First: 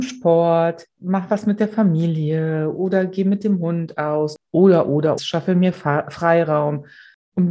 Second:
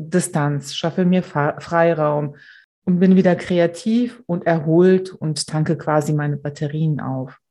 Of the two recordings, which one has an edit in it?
first; 1 cut; at 5.2 s

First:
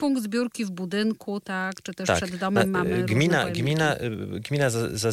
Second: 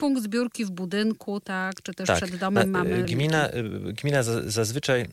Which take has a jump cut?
second; 1 cut; at 3.0 s

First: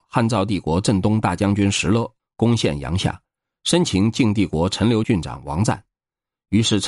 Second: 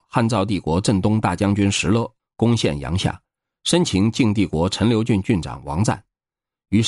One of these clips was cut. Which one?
first; 1 cut; at 5.0 s

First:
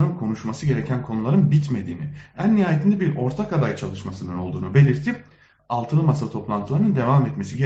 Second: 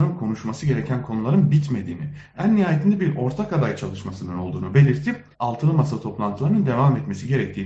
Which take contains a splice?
second; 1 cut; at 5.3 s

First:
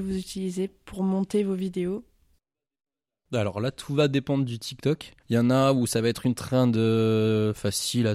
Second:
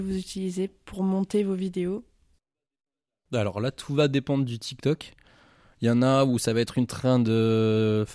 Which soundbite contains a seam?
first; 1 cut; at 5.2 s

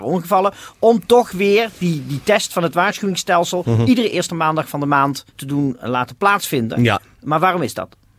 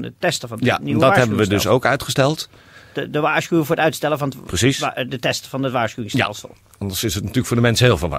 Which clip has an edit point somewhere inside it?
first; 1 cut; at 5.3 s

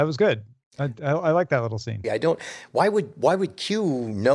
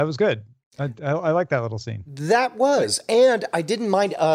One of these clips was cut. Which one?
first; 1 cut; at 2.0 s

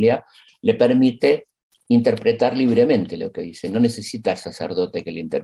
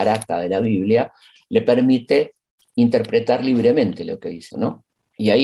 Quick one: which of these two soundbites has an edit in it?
second; 1 cut; at 4.5 s

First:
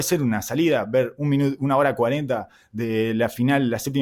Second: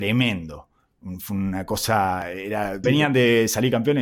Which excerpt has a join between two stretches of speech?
second; 1 cut; at 2.8 s

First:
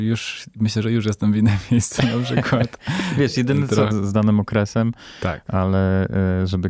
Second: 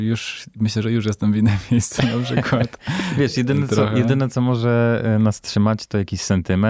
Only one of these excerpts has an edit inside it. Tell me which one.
first; 1 cut; at 3.9 s

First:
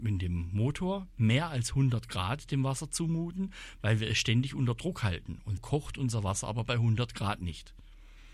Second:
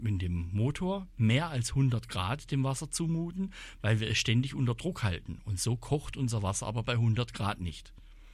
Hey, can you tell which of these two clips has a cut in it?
first; 1 cut; at 5.6 s

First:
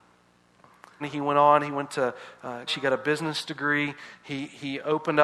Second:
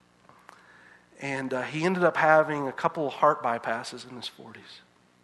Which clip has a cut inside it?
first; 2 cuts; at 1.0 s, 2.7 s

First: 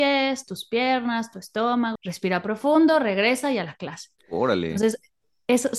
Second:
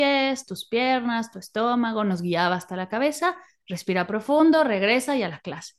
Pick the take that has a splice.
first; 2 cuts; at 2.0 s, 4.2 s

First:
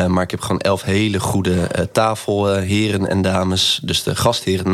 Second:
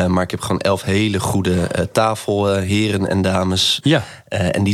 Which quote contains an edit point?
second; 1 cut; at 3.8 s

